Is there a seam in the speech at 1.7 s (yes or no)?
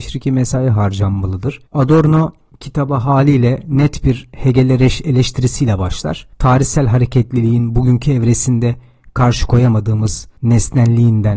yes